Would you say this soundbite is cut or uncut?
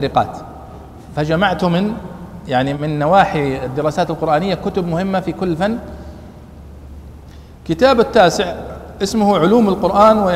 cut